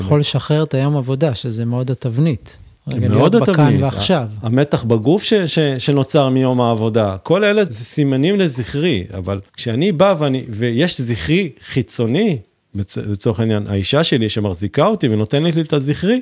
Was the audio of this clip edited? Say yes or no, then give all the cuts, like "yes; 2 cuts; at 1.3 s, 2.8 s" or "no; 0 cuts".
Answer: yes; 2 cuts; at 7.7 s, 9.5 s